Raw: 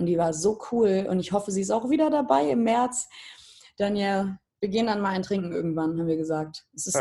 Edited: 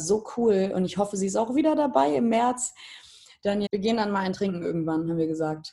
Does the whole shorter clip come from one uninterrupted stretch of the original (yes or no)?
no